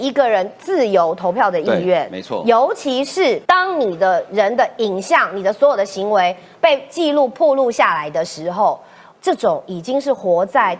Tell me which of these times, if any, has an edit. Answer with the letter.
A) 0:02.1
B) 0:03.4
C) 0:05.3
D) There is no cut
B